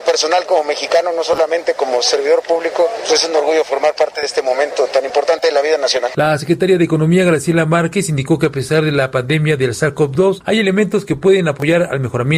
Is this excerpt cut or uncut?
uncut